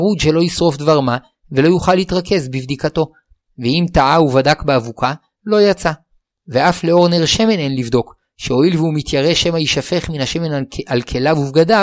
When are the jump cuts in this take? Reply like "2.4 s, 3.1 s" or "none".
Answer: none